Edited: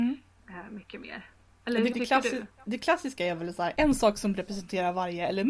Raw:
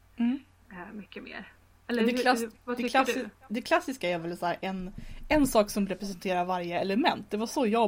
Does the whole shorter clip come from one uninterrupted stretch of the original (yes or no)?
no